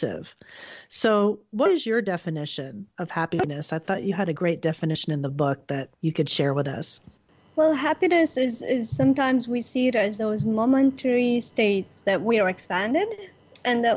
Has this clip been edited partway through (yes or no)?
yes